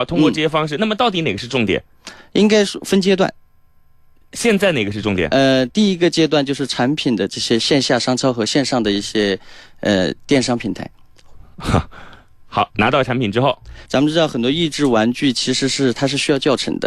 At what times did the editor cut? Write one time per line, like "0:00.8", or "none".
0:12.7
0:13.9